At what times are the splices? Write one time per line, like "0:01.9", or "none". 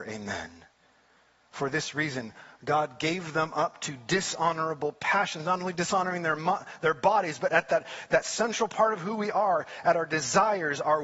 none